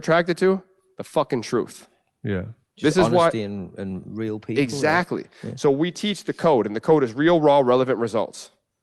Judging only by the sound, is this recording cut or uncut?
uncut